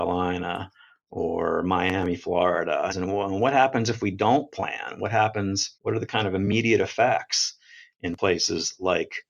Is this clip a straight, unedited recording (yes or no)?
no